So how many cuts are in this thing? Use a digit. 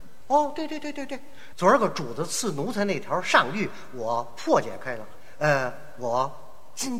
1